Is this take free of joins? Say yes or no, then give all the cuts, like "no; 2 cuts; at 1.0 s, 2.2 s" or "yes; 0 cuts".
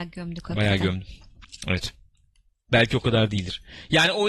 yes; 0 cuts